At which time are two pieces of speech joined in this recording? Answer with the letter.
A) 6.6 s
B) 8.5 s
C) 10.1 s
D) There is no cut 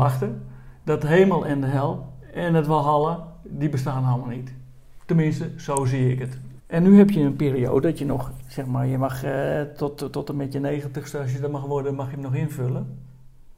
A